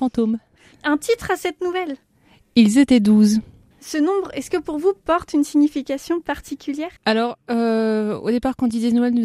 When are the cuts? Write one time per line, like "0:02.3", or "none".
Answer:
0:03.7
0:07.0